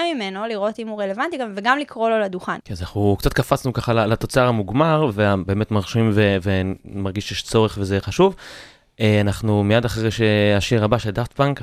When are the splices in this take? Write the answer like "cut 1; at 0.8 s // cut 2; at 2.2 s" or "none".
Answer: cut 1; at 2.6 s